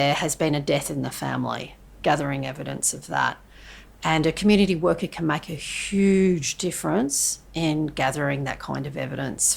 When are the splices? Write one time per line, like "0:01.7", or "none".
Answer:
0:03.9